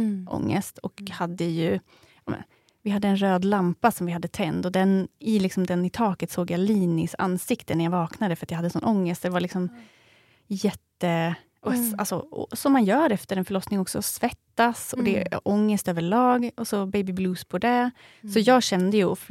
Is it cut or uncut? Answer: uncut